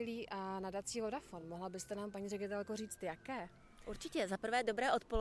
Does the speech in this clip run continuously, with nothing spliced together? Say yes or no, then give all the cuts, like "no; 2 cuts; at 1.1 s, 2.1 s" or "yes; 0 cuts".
yes; 0 cuts